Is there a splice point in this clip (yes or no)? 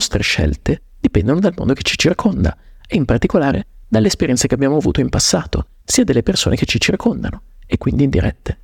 yes